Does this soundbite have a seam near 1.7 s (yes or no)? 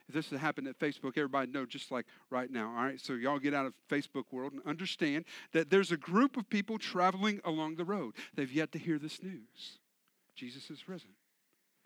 no